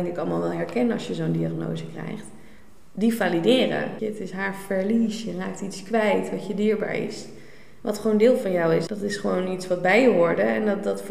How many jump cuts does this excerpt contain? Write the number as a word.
two